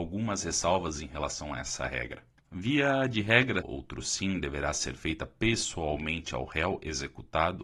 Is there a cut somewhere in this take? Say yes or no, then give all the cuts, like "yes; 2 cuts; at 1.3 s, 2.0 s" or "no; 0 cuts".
yes; 2 cuts; at 2.4 s, 3.6 s